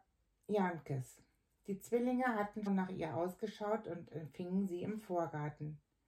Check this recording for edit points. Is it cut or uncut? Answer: cut